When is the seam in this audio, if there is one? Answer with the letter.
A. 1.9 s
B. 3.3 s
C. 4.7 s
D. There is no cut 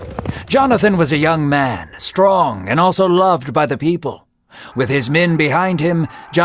C